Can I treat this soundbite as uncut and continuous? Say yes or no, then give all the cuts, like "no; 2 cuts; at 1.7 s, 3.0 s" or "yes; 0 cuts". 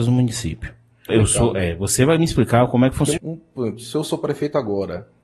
no; 2 cuts; at 1.1 s, 3.2 s